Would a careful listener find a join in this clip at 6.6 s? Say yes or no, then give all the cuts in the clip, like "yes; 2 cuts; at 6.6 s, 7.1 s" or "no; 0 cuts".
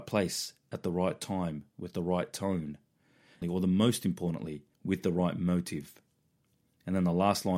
no; 2 cuts; at 3.4 s, 4.7 s